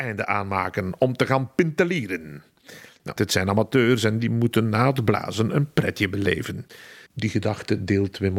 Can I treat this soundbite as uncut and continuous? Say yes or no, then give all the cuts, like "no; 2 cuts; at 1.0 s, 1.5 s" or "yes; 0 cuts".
no; 2 cuts; at 3.2 s, 7.1 s